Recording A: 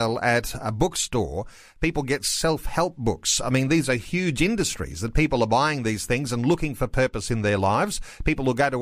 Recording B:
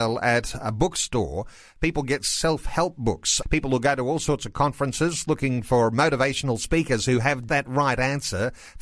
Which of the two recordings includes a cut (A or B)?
B